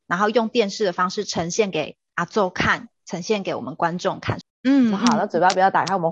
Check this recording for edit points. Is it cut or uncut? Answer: cut